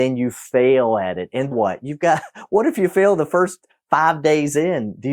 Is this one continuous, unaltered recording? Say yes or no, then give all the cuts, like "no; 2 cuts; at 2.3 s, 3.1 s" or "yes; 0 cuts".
no; 1 cut; at 1.5 s